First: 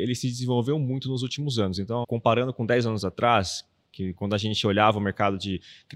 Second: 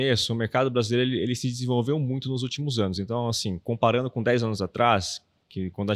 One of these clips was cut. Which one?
first; 1 cut; at 2.0 s

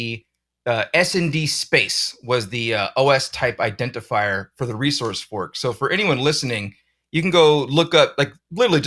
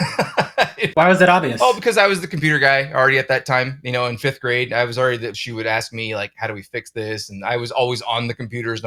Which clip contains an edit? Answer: second; 1 cut; at 5.3 s

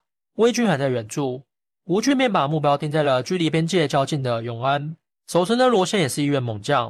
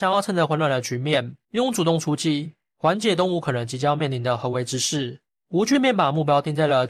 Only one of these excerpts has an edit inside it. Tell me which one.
second; 2 cuts; at 1.4 s, 5.3 s

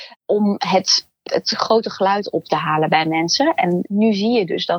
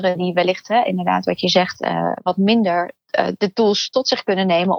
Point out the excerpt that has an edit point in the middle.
first; 1 cut; at 1.3 s

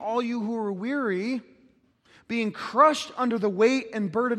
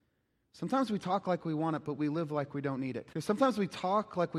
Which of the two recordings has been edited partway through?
second; 1 cut; at 3.1 s

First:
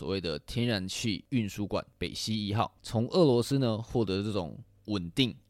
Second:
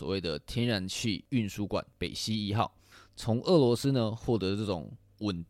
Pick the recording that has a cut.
first; 1 cut; at 2.8 s

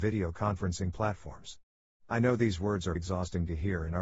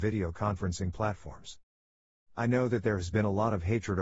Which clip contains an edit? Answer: first; 2 cuts; at 1.9 s, 3.0 s

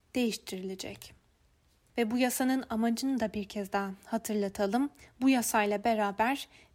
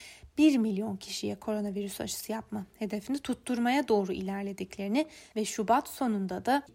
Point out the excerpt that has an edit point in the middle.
first; 1 cut; at 1.9 s

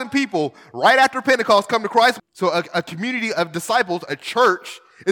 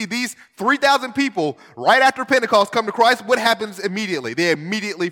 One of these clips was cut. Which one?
first; 1 cut; at 2.2 s

